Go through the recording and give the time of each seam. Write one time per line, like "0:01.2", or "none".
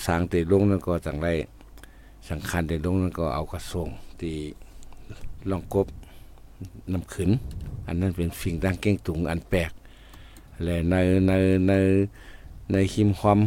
none